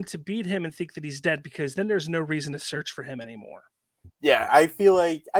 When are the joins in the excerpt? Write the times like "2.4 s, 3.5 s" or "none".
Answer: 4.0 s